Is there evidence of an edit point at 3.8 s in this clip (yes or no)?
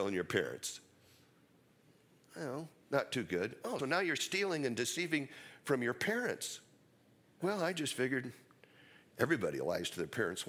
yes